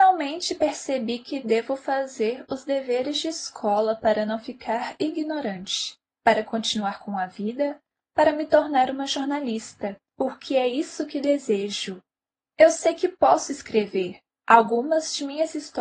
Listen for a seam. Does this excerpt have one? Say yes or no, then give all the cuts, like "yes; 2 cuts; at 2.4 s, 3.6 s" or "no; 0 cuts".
no; 0 cuts